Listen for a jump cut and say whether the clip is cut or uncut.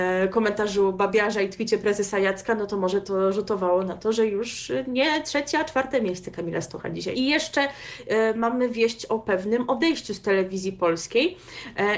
cut